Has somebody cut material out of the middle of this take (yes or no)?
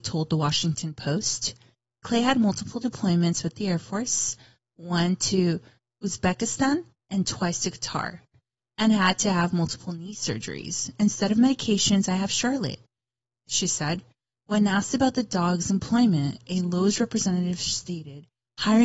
no